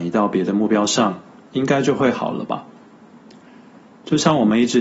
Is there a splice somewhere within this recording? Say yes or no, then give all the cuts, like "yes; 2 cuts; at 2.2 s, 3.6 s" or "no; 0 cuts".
no; 0 cuts